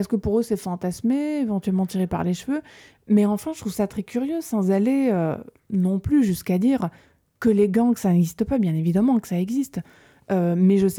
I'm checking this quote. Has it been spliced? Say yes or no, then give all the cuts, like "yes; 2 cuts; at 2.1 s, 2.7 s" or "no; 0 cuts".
no; 0 cuts